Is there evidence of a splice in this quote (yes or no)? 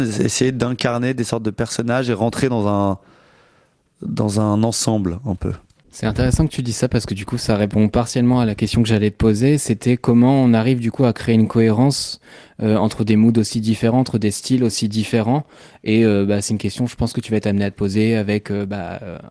no